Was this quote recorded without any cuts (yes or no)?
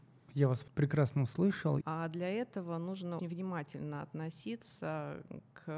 no